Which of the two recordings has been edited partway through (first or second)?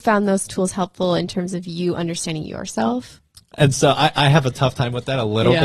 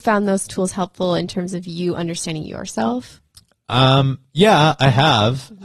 first